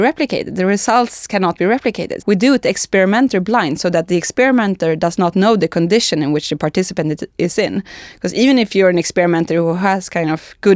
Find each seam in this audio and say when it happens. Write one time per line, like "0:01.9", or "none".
0:02.2